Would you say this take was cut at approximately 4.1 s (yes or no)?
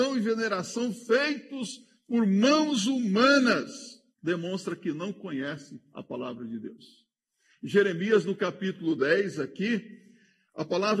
yes